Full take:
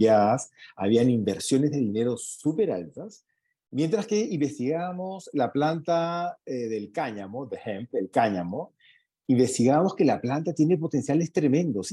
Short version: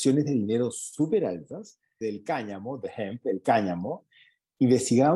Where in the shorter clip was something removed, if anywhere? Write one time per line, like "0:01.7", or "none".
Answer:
0:02.0